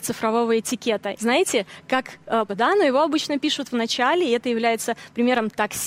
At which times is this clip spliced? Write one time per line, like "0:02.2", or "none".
0:01.2
0:02.5